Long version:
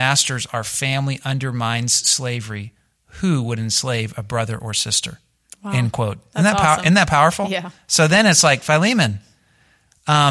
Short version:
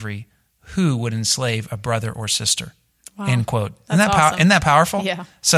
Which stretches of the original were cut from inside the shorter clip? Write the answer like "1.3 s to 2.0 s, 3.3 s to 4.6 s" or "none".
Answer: none

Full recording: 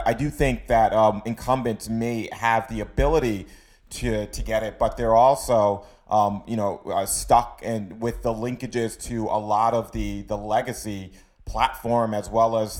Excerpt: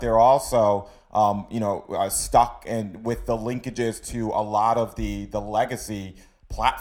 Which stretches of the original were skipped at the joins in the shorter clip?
none

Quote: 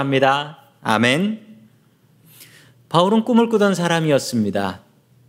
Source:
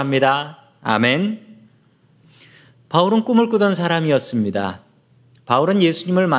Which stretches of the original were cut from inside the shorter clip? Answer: none

